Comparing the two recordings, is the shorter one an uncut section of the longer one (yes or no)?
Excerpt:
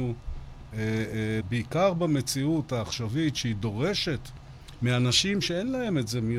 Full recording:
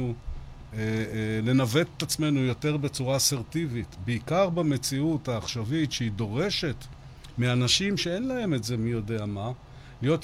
no